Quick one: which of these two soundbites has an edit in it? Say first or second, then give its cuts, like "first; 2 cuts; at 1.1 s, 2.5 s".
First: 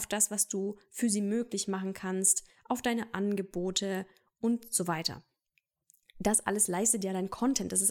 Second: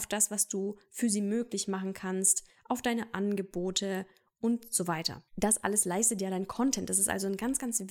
second; 1 cut; at 5.3 s